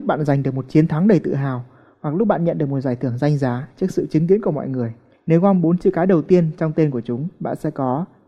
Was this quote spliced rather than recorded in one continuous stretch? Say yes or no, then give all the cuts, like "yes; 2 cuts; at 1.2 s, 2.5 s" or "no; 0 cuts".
yes; 1 cut; at 5.1 s